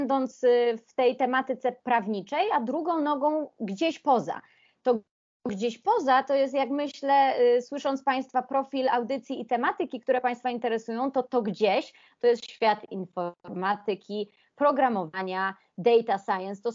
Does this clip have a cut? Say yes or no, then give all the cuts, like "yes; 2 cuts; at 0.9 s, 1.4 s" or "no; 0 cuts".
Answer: yes; 1 cut; at 11.2 s